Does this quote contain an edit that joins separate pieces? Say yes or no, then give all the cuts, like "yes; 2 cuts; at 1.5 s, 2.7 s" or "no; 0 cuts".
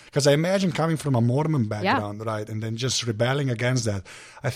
no; 0 cuts